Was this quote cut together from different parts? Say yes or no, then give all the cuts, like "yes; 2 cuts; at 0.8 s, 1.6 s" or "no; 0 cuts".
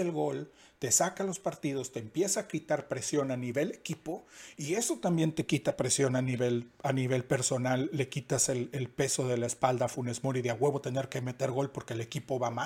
no; 0 cuts